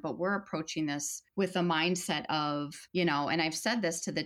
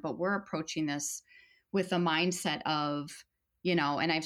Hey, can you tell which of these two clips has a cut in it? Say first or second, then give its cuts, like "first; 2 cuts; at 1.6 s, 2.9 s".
first; 2 cuts; at 1.3 s, 2.9 s